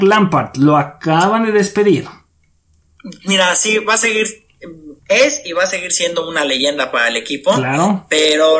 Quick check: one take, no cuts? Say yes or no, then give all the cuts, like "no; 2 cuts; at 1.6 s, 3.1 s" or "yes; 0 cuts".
no; 1 cut; at 5.0 s